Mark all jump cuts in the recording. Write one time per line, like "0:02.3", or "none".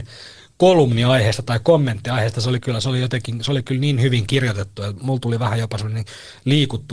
none